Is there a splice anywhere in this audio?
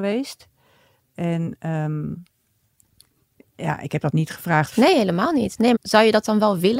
yes; 2 cuts; at 4.7 s, 5.7 s

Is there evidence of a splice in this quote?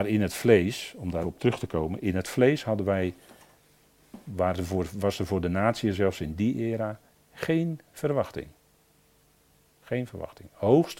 yes; 1 cut; at 1.2 s

